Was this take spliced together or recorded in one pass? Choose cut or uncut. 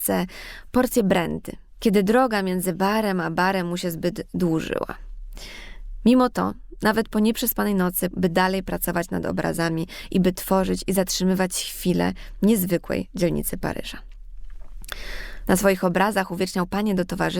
cut